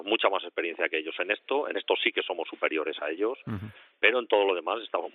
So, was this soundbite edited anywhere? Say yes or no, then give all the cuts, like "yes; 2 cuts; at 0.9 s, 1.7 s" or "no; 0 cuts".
no; 0 cuts